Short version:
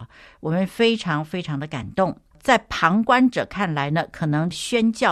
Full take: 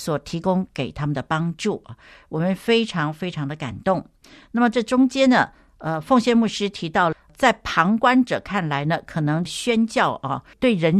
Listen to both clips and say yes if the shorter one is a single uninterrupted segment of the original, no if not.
no